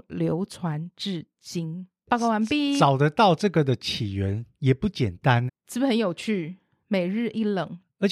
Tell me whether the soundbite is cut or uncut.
cut